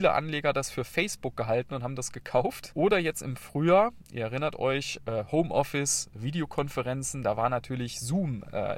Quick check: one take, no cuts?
no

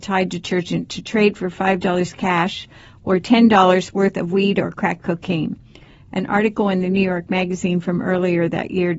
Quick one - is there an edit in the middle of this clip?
no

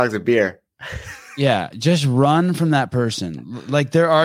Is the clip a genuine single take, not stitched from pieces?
yes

